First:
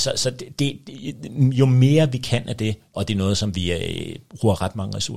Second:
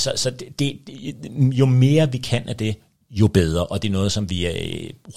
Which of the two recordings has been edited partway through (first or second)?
first